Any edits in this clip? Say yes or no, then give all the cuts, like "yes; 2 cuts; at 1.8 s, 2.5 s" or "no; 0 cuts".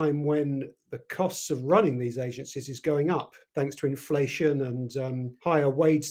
no; 0 cuts